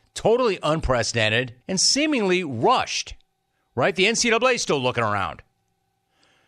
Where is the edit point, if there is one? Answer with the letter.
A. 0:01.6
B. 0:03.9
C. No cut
A